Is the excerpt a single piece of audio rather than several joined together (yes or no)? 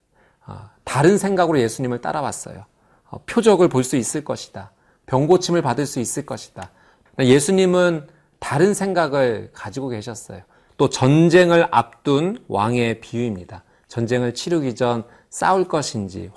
no